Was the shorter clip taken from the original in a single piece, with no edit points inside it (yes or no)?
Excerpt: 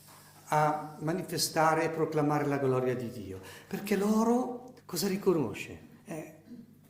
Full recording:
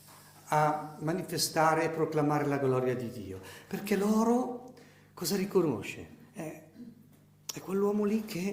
no